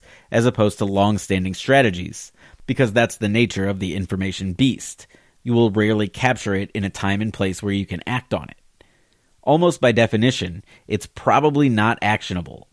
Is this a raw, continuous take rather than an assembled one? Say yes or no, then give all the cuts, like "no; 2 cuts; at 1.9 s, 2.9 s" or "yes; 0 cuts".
no; 1 cut; at 10.8 s